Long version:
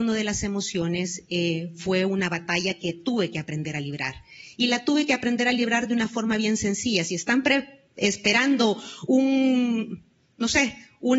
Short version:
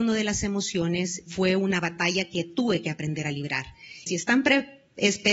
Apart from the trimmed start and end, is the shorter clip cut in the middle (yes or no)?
yes